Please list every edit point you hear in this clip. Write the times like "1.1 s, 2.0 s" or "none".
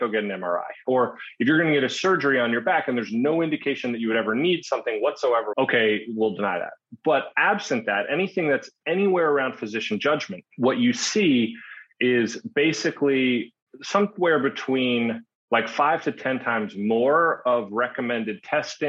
5.5 s